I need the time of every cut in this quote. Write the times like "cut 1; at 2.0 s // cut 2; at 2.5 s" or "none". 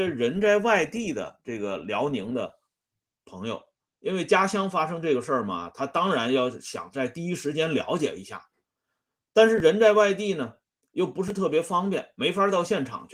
none